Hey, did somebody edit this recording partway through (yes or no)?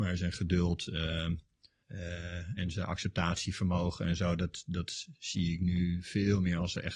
no